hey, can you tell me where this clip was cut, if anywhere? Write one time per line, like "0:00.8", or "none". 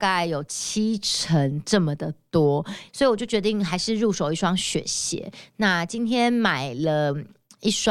0:02.9